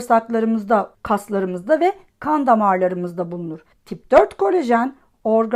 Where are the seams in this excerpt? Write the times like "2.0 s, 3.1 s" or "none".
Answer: 0.9 s, 3.7 s